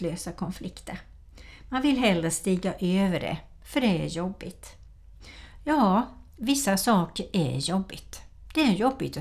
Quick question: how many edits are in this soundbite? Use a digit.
0